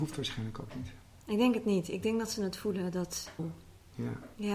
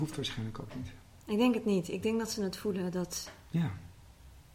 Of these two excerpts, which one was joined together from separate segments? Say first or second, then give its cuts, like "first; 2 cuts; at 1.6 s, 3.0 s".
first; 1 cut; at 3.4 s